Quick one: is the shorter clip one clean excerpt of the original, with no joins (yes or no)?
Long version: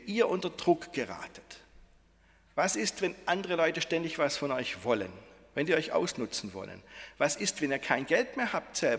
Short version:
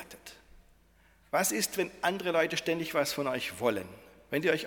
yes